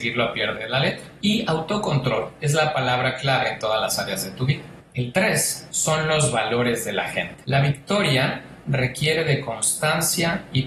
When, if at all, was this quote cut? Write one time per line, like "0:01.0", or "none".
none